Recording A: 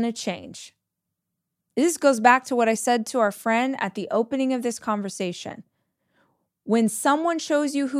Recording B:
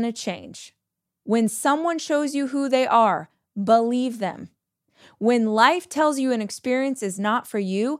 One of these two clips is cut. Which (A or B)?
B